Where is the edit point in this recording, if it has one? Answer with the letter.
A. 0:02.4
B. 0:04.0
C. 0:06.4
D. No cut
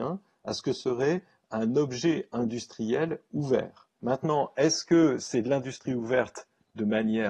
B